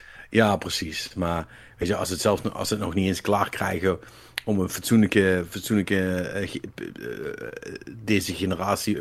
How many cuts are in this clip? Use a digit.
0